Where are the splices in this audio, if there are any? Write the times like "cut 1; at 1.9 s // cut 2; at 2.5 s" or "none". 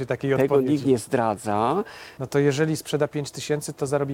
cut 1; at 2.2 s